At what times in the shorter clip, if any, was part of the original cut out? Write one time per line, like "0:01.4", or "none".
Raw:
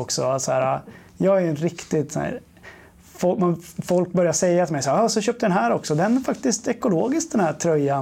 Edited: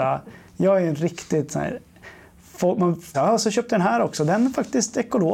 0:03.1